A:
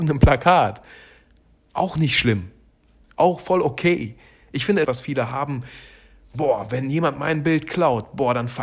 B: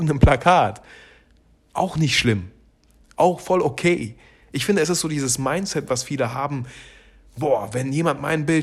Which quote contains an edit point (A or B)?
A